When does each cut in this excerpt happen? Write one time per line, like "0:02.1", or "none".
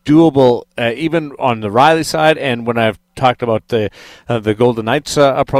none